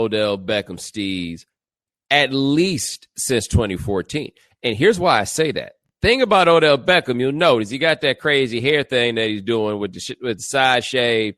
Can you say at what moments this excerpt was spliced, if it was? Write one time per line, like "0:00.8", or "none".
none